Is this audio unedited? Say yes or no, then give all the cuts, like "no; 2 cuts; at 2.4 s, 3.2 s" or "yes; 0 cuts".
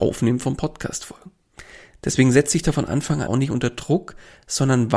no; 1 cut; at 3.3 s